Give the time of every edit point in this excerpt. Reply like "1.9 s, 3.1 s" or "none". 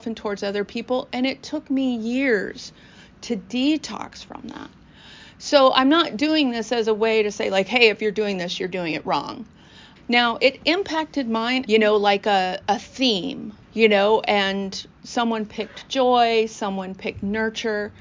10.0 s, 11.7 s, 13.6 s